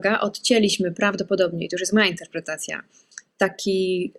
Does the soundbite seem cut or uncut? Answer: uncut